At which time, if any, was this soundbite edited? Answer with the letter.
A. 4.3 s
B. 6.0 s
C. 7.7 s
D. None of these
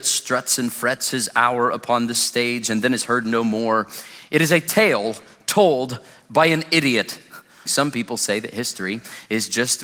C